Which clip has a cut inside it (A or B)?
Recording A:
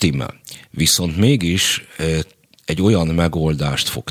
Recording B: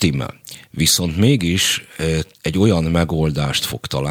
B